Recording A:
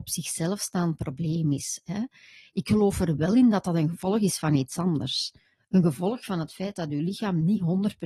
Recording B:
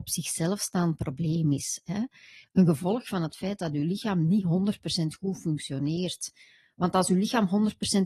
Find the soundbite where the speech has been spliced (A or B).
B